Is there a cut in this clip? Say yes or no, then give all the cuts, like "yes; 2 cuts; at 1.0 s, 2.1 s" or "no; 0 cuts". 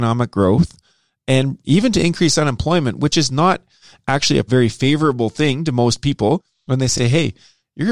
no; 0 cuts